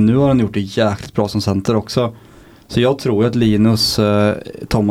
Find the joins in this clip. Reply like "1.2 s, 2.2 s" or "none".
none